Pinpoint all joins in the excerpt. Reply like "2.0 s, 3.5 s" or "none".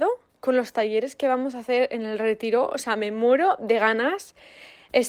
none